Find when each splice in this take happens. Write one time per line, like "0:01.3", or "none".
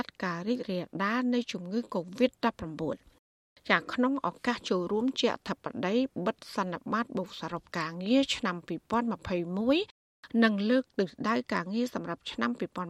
none